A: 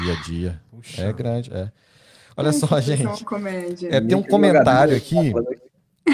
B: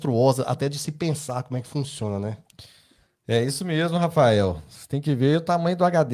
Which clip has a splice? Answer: B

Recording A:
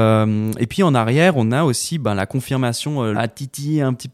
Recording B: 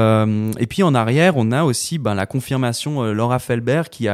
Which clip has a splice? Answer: A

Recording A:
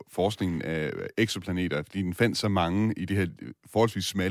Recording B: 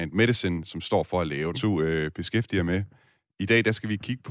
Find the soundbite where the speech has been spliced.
B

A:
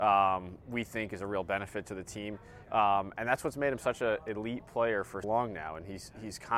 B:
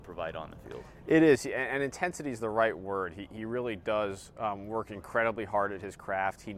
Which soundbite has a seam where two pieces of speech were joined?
A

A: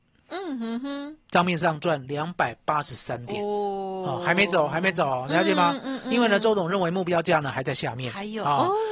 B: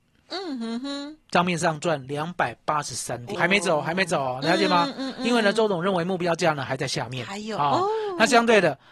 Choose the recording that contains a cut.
B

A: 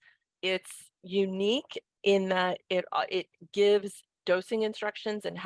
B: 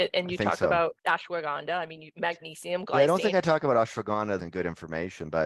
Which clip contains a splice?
B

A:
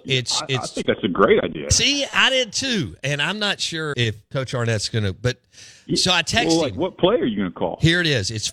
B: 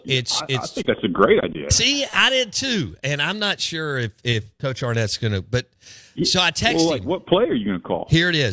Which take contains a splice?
A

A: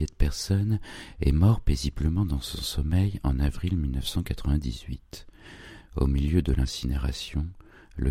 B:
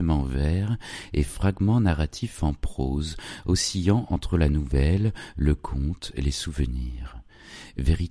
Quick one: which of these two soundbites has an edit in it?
A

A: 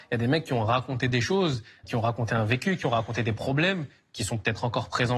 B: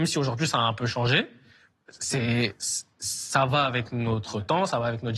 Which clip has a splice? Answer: A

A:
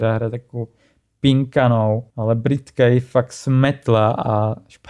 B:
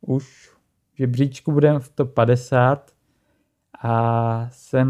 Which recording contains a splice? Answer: A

